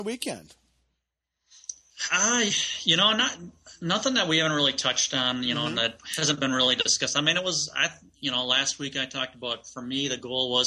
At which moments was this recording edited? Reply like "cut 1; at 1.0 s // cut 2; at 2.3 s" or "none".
none